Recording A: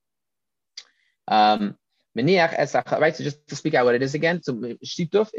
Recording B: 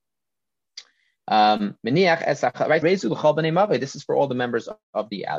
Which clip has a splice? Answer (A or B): B